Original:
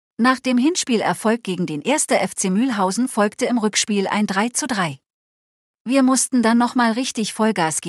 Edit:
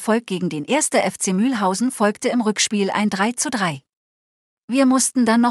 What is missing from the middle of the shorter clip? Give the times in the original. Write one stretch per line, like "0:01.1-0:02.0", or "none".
none